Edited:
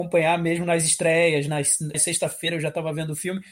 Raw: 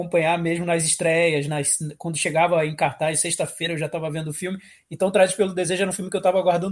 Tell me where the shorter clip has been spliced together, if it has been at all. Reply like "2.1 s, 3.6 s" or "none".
1.9 s